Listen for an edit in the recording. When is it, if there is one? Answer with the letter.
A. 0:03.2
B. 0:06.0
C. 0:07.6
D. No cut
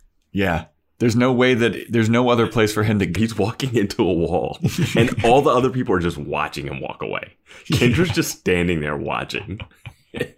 A